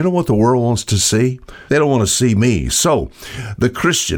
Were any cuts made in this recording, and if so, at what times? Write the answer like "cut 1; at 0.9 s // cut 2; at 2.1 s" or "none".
cut 1; at 1.7 s